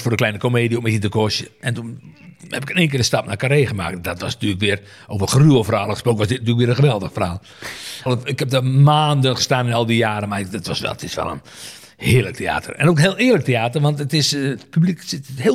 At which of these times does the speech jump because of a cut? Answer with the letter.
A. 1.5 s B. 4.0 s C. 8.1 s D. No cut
C